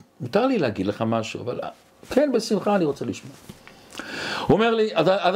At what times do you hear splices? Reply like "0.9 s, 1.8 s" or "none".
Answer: none